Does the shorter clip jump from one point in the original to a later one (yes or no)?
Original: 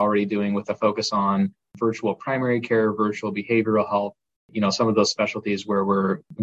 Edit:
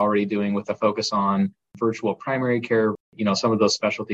yes